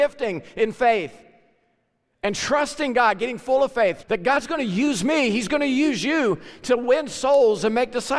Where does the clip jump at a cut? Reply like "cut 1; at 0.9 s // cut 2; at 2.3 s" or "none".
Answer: cut 1; at 4.0 s